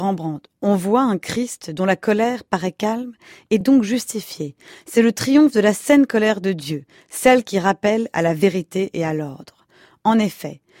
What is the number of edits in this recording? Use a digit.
0